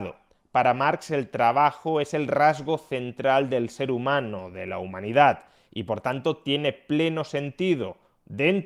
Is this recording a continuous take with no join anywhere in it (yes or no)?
yes